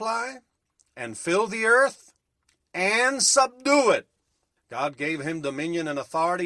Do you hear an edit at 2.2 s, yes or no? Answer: no